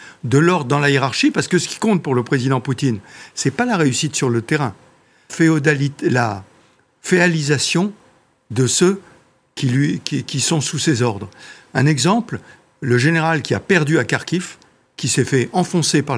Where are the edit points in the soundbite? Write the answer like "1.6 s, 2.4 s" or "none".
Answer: 5.3 s